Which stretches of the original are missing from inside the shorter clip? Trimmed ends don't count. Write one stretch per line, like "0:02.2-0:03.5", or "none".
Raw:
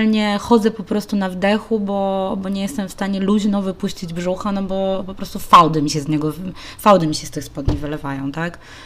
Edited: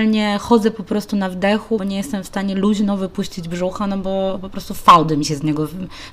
0:01.8-0:02.4

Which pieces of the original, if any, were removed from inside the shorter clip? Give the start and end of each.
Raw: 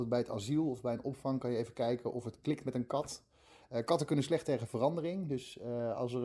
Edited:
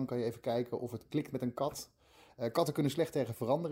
none

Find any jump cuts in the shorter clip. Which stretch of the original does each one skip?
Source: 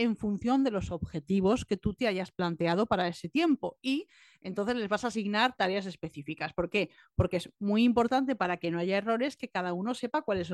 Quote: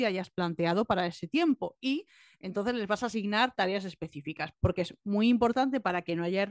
0:06.5-0:07.1

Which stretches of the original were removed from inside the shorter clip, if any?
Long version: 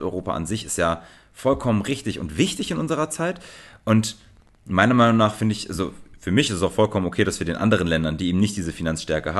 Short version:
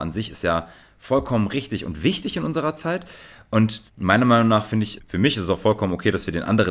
0:04.2-0:04.6
0:05.7-0:06.1

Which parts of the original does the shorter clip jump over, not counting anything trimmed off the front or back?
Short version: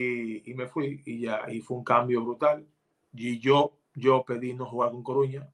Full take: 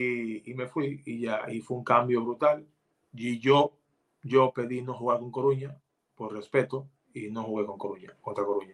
0:03.8-0:04.1

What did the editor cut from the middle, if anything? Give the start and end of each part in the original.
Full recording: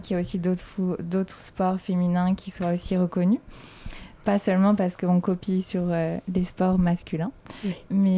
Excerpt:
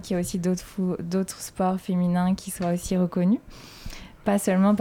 none

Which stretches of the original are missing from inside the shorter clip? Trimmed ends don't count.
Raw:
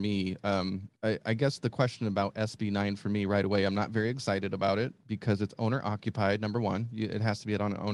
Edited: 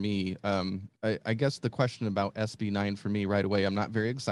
none

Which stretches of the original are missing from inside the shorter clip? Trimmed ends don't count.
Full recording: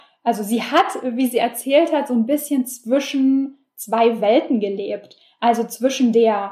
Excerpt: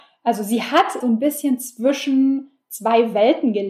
0:01.0-0:02.1

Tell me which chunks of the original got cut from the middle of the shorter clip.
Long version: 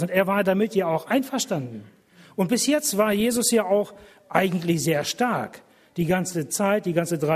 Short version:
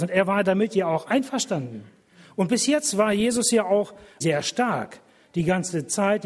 0:04.2-0:04.8

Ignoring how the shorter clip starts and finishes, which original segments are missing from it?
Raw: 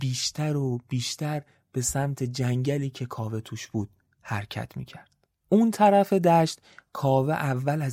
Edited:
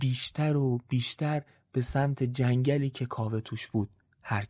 none

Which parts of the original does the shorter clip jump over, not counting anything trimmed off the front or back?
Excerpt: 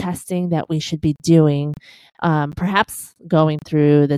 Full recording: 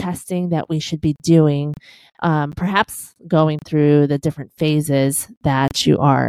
none

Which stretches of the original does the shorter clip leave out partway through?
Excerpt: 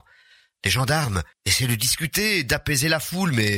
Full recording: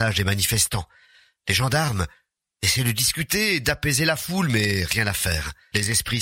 0:02.2-0:02.5

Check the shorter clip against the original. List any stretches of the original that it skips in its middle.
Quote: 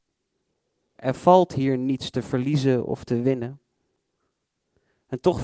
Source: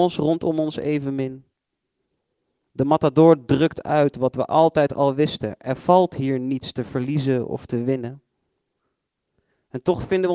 0:02.6-0:05.6

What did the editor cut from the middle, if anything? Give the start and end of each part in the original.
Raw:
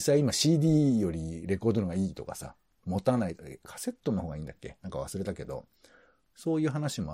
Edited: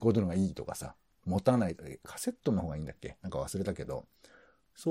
none

